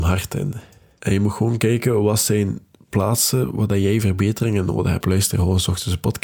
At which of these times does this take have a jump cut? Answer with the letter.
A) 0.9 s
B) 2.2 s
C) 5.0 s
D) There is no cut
C